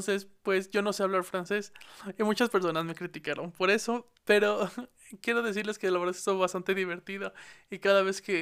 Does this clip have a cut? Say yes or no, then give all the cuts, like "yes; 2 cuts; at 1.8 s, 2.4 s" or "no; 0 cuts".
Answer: no; 0 cuts